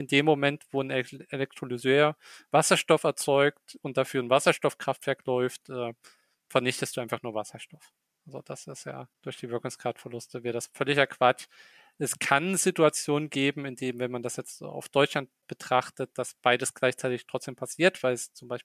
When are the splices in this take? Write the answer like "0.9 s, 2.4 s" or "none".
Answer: none